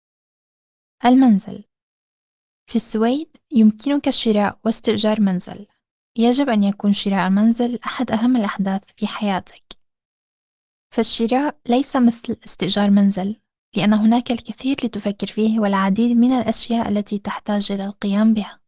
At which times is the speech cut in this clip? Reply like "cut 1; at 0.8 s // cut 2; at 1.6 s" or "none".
none